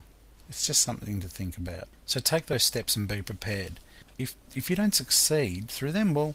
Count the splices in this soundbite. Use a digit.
1